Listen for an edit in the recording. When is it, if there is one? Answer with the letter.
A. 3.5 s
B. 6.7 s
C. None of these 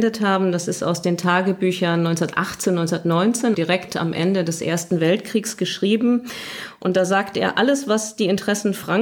A